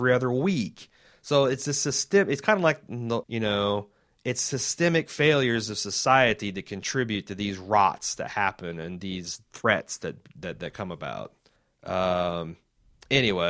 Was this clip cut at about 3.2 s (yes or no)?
yes